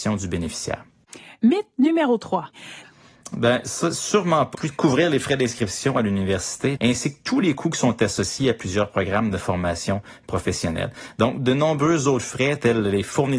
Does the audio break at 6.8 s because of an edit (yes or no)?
yes